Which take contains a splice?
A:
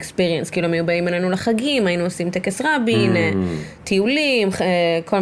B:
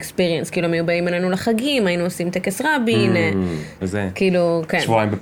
B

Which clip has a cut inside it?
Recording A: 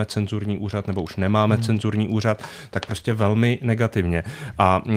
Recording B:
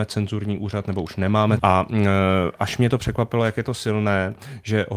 B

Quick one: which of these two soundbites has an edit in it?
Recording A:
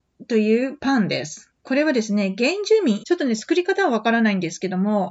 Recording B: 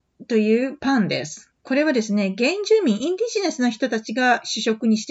A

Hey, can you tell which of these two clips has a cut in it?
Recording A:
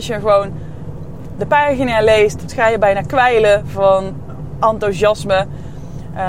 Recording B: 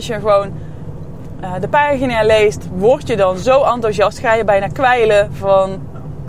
A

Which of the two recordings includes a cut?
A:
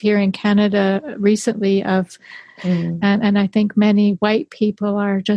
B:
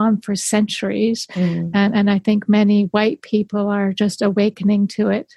A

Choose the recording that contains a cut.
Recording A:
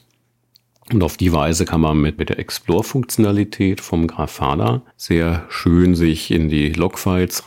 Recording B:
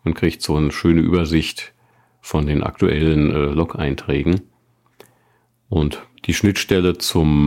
A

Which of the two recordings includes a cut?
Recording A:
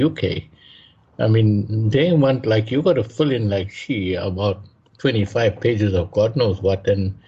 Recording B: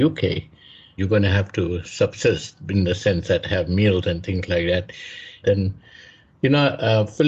B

